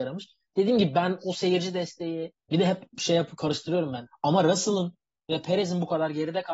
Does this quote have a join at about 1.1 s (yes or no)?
no